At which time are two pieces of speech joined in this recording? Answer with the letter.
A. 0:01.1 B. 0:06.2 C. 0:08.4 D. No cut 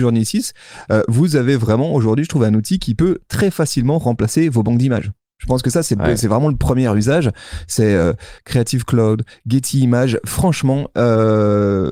C